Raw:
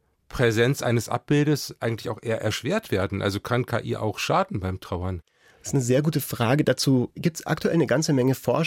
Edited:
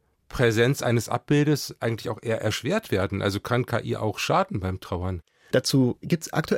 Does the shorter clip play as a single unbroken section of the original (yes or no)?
no